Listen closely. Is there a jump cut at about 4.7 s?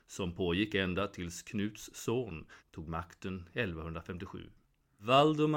no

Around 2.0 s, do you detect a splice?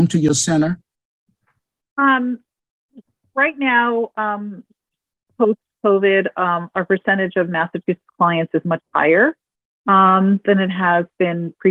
yes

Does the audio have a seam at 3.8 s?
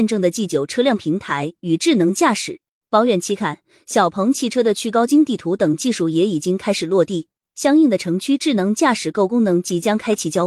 no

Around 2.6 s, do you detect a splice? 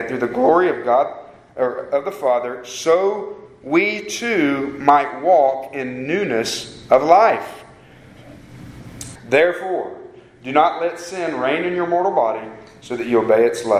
no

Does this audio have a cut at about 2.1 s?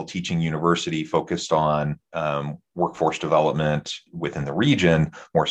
no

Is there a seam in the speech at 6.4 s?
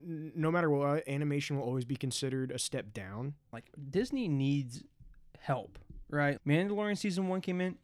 yes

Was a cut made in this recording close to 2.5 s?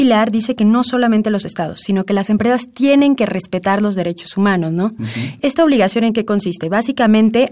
no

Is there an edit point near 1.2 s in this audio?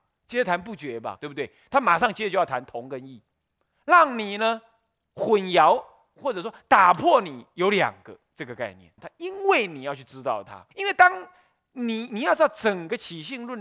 yes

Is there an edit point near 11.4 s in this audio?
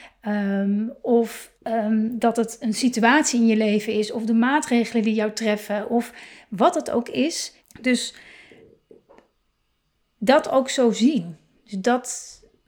no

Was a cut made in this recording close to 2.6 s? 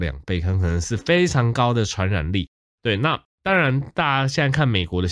yes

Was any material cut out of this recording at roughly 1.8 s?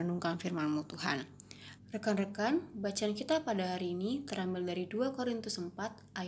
yes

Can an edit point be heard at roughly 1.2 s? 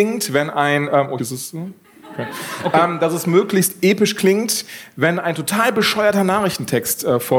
yes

